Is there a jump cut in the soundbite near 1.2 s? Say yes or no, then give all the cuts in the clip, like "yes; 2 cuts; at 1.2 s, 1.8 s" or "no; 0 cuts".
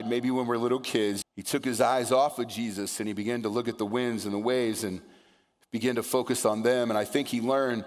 yes; 1 cut; at 1.2 s